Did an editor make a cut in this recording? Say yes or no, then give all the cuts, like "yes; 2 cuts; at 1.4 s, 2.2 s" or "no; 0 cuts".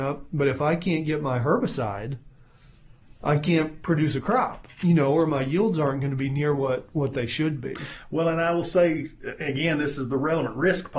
no; 0 cuts